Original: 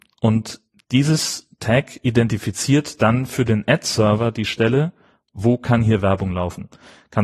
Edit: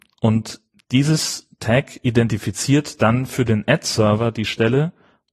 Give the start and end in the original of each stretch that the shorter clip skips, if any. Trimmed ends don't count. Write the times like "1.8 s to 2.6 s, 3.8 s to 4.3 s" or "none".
none